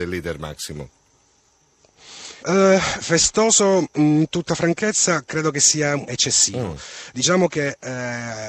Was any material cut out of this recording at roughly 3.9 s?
no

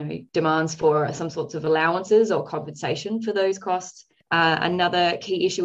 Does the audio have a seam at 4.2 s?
yes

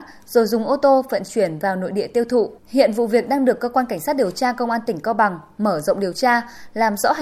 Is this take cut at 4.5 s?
no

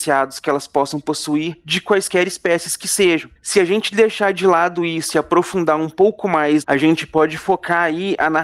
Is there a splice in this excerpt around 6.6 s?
yes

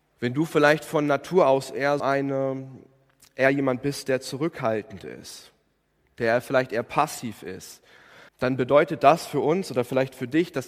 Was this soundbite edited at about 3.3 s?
no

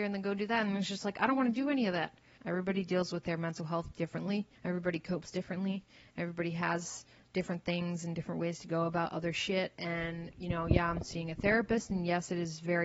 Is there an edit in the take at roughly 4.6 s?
yes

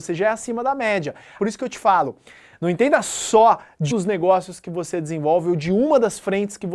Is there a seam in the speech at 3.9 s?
yes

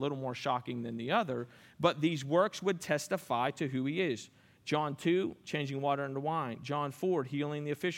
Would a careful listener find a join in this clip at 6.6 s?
no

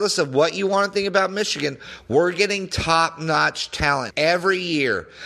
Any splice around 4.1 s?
yes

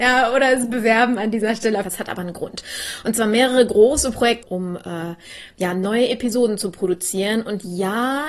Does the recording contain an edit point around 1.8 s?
yes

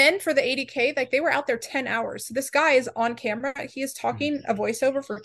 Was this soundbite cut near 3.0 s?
no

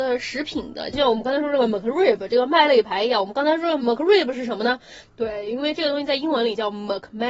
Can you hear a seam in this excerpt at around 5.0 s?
yes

